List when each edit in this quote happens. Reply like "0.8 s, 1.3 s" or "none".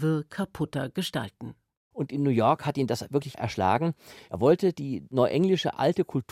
none